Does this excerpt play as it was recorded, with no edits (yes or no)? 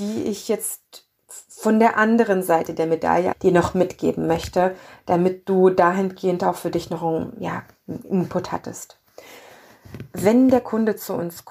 no